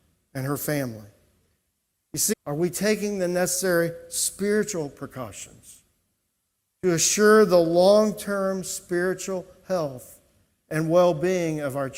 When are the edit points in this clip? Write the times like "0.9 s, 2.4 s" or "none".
2.3 s